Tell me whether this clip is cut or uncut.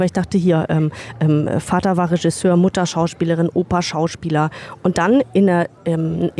uncut